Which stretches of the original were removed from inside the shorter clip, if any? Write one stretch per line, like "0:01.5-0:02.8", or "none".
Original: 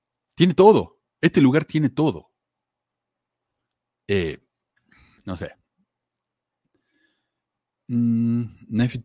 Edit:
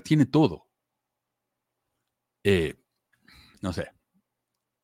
none